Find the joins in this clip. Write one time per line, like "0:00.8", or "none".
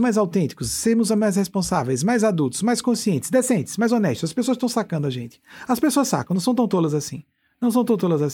none